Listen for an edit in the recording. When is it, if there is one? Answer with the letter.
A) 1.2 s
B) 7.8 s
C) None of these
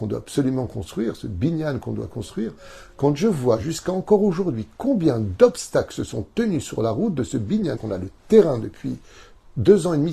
B